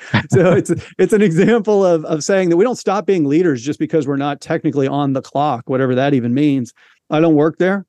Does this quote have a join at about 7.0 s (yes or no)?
yes